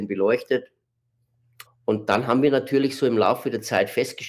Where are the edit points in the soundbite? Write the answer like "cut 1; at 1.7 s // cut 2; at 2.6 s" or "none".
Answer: cut 1; at 1.7 s